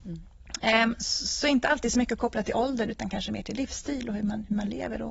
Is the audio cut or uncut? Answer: uncut